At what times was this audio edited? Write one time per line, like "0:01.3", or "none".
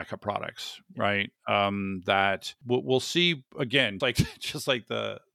0:04.0